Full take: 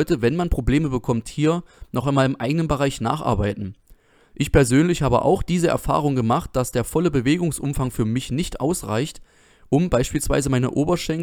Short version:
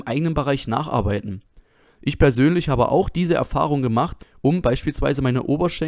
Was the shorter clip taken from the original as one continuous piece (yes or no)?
no